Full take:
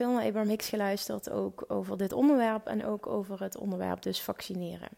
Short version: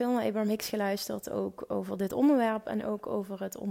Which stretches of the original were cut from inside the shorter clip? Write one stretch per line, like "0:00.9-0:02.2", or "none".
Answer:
none